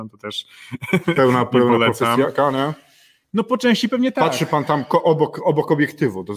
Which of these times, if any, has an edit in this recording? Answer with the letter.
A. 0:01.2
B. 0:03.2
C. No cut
C